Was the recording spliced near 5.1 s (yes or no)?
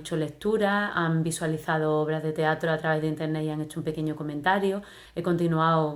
yes